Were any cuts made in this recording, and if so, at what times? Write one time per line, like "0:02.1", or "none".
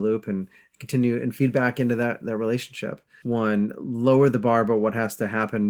0:03.2